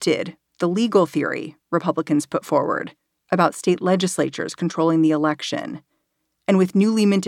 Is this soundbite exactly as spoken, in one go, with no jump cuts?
yes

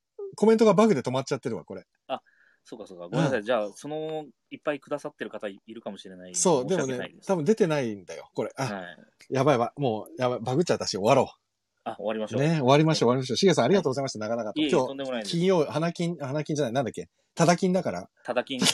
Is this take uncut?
yes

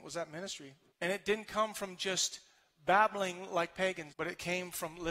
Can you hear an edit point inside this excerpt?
yes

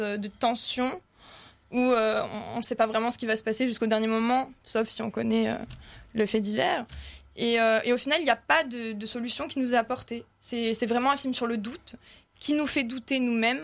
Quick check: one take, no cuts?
yes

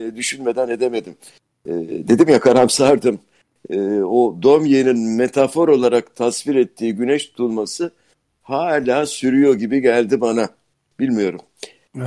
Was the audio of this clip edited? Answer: no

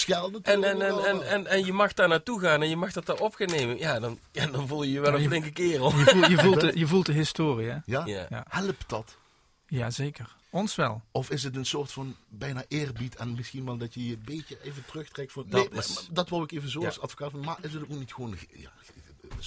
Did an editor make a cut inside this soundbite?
yes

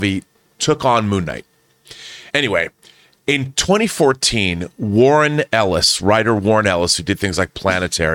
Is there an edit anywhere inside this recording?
yes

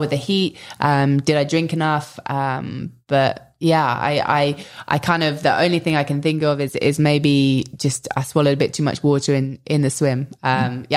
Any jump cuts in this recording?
no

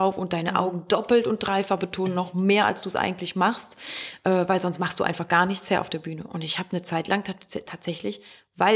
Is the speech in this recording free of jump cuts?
yes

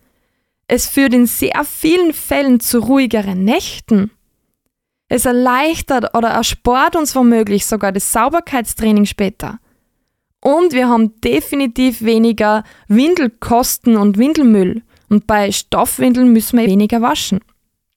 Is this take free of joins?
no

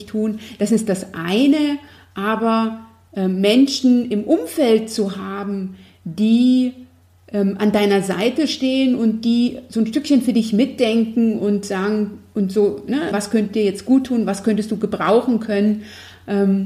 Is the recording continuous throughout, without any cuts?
no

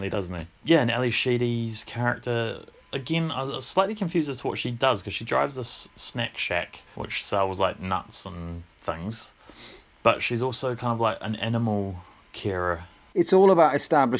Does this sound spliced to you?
no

